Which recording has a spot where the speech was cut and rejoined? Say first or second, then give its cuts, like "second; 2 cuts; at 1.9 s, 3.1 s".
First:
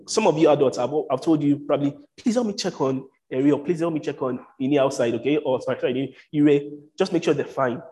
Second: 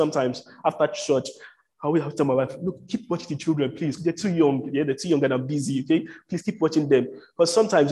second; 1 cut; at 4.0 s